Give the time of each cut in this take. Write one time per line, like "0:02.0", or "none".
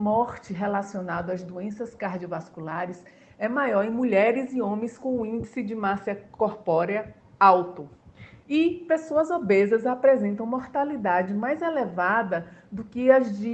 none

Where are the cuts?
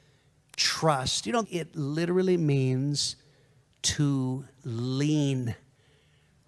0:01.4

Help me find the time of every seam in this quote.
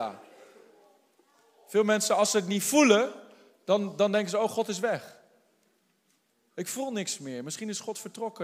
none

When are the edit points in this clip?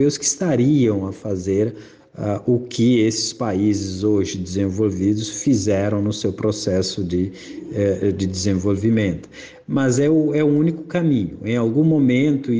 none

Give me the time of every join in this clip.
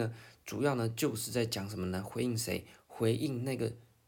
none

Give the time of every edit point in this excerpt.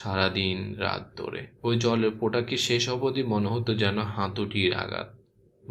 0:01.6

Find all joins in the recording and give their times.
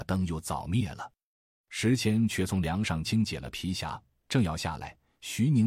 0:03.0

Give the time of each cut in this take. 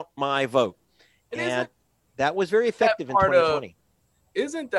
none

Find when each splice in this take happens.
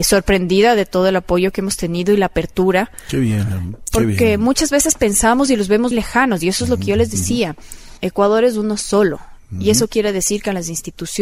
0:05.9
0:08.0

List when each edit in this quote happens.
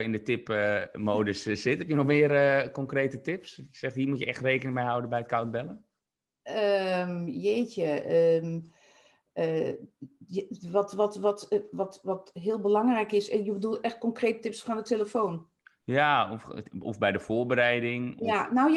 none

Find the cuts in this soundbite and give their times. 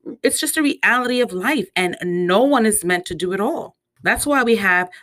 0:04.0

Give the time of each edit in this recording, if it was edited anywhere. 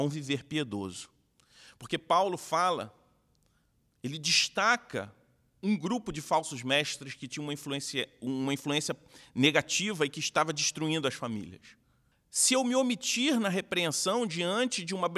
0:12.1

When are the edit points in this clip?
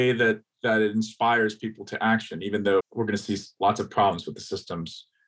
0:02.8

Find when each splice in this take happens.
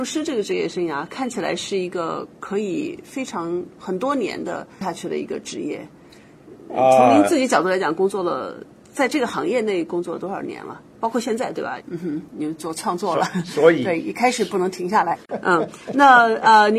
0:11.8
0:15.2

